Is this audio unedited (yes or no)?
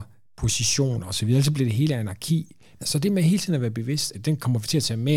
no